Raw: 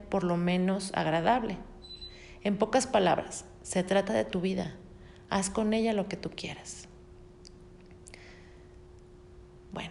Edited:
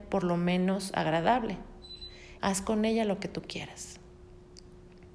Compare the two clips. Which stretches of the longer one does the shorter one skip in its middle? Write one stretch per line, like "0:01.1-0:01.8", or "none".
0:02.4-0:05.3